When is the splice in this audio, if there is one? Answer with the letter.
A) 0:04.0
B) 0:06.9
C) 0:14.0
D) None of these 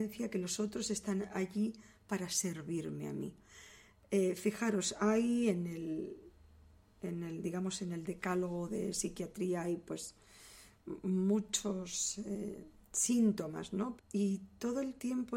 C